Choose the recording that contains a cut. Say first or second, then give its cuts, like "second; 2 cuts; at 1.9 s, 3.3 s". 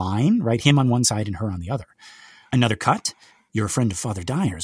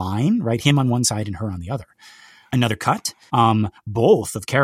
second; 1 cut; at 3.3 s